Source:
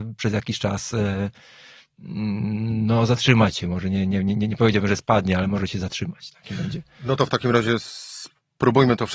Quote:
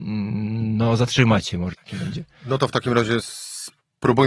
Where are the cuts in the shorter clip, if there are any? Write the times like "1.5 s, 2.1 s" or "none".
1.7 s